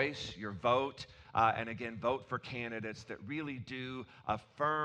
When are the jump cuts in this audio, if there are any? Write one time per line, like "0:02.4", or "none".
none